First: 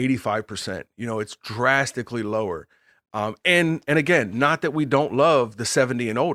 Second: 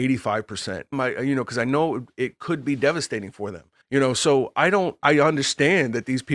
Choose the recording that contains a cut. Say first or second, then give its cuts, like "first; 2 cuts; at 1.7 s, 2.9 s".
second; 3 cuts; at 0.9 s, 3.8 s, 5.0 s